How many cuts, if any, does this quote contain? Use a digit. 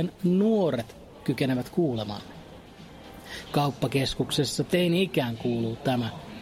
1